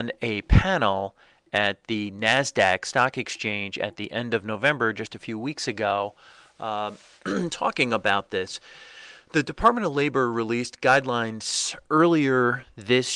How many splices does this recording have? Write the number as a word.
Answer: zero